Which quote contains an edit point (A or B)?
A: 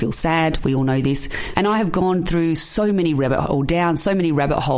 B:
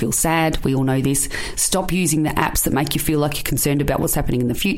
A